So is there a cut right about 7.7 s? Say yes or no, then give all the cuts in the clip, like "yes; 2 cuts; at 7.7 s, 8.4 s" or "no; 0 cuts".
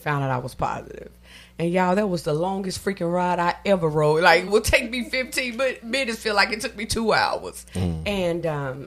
yes; 2 cuts; at 4.5 s, 7.7 s